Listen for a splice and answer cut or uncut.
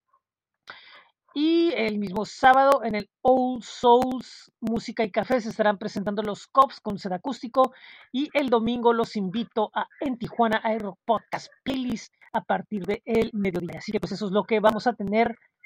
uncut